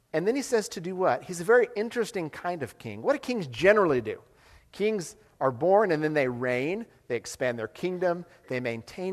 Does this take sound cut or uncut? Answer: uncut